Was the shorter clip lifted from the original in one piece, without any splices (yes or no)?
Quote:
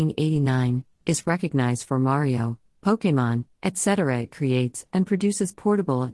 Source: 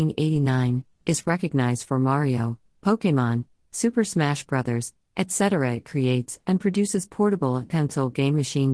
no